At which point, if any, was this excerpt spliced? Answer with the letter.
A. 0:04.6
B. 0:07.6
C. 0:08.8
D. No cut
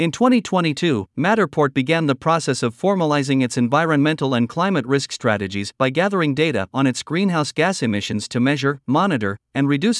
D